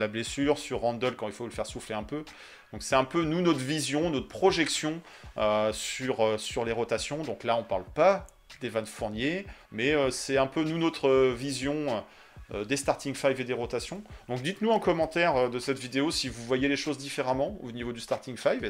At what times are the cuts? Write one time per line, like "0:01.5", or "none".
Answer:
0:09.7